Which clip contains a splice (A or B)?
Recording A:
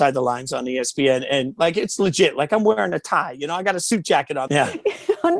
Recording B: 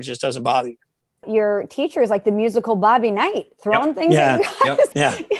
A